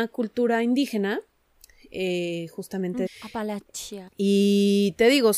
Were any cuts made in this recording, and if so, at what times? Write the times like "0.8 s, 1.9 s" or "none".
3.1 s, 4.1 s